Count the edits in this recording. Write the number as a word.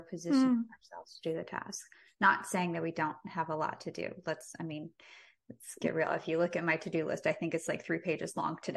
zero